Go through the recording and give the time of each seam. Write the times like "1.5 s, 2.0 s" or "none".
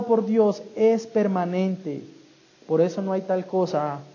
none